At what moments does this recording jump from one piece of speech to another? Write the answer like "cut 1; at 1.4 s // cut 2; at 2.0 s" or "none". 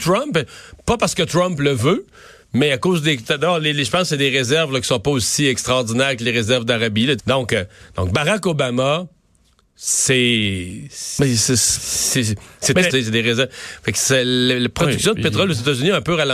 cut 1; at 7.2 s // cut 2; at 12.9 s